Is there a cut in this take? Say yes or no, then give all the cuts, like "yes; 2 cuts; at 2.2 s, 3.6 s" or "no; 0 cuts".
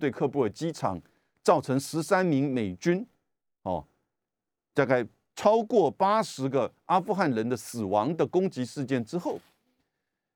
no; 0 cuts